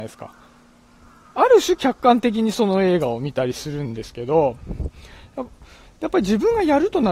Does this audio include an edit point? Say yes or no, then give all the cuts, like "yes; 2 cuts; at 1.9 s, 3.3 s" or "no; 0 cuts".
no; 0 cuts